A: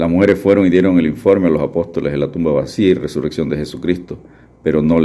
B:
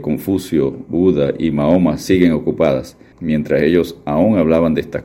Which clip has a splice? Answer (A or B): B